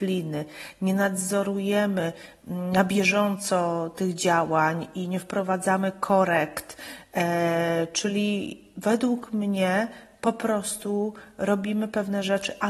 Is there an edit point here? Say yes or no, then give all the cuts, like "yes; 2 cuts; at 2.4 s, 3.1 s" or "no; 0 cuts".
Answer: no; 0 cuts